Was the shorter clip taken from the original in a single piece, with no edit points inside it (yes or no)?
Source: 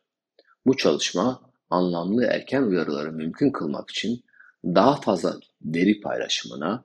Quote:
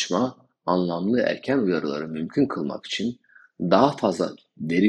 yes